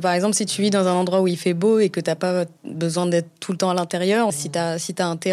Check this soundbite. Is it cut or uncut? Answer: cut